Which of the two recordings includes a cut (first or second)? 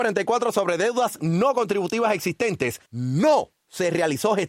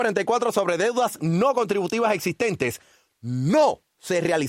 first